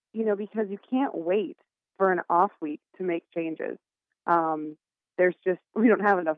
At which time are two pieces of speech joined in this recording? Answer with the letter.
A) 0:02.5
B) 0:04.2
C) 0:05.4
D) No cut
D